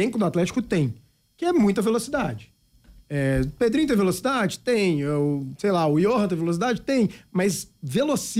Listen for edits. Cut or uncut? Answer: uncut